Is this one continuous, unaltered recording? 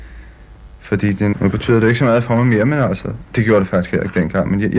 no; 1 cut; at 1.3 s

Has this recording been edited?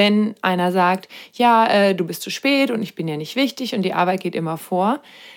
no; 0 cuts

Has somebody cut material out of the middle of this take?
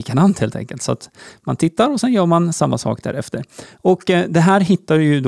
no; 0 cuts

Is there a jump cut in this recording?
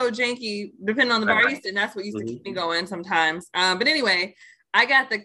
yes; 1 cut; at 1.6 s

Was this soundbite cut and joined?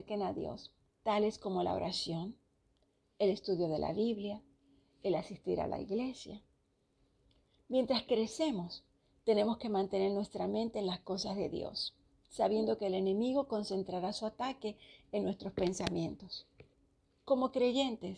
no; 0 cuts

